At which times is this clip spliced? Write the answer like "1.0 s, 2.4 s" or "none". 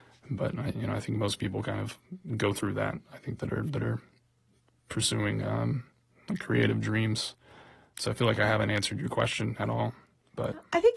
none